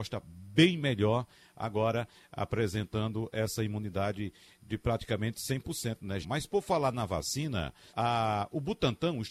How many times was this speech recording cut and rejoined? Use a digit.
2